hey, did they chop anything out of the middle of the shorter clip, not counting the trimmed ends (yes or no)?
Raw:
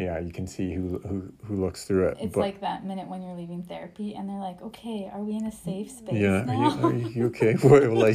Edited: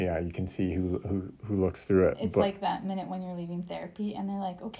no